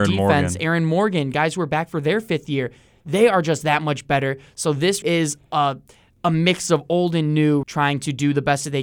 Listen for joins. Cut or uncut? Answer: cut